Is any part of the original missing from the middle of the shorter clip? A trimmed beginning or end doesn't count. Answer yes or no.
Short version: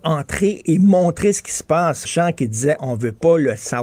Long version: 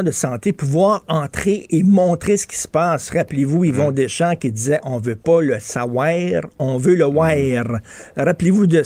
yes